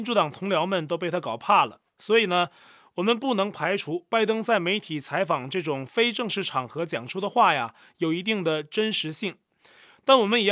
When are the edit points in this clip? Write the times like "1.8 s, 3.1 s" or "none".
none